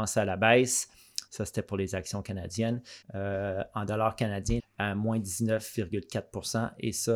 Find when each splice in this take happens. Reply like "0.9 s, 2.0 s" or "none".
1.3 s, 3.0 s, 4.6 s